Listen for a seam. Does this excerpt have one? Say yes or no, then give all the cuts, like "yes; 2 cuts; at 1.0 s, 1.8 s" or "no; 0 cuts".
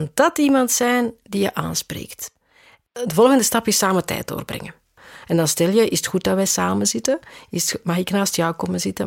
no; 0 cuts